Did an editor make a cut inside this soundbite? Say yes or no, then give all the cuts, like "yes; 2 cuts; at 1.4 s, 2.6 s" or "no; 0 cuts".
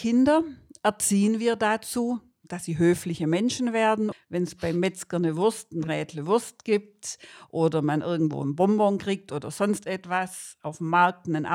yes; 1 cut; at 4.1 s